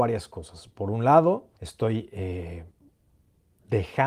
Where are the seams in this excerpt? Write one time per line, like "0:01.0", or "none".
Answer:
0:01.5